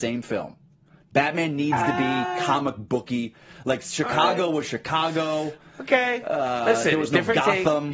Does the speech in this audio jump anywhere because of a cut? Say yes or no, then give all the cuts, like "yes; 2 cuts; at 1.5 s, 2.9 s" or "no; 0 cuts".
no; 0 cuts